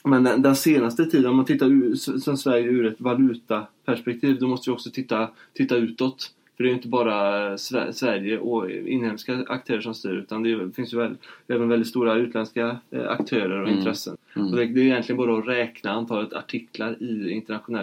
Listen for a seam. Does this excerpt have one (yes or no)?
yes